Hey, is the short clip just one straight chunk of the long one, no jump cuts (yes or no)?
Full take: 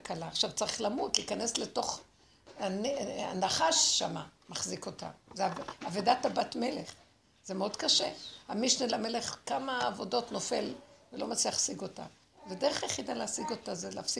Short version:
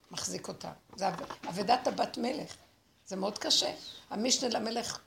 yes